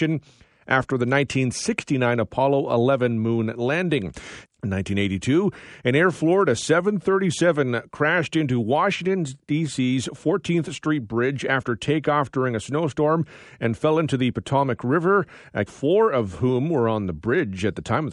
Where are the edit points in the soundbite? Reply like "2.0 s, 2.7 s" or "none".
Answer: 4.4 s, 15.7 s